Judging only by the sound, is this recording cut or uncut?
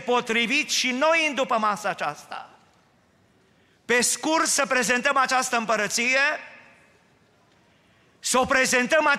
uncut